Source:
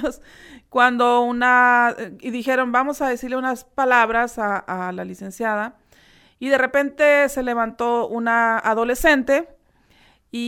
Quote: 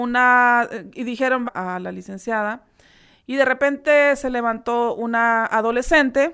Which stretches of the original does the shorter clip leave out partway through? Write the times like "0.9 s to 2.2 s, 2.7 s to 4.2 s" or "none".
2.7 s to 4.6 s